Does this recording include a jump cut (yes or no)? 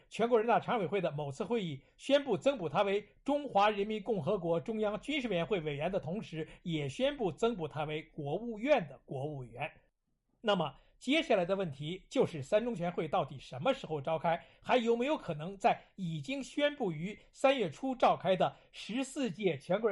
no